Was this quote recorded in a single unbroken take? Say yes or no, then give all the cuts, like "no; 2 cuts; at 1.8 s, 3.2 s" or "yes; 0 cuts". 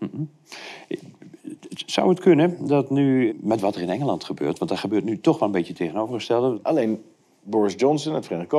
no; 2 cuts; at 3.3 s, 6.5 s